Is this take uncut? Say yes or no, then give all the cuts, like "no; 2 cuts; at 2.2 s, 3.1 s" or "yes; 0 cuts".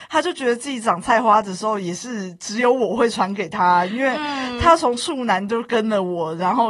yes; 0 cuts